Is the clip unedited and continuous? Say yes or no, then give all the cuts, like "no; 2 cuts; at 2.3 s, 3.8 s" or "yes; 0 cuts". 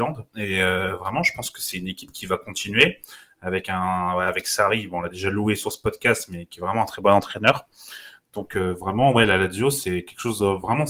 yes; 0 cuts